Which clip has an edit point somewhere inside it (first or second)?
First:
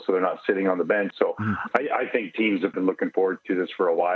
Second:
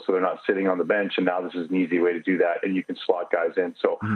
first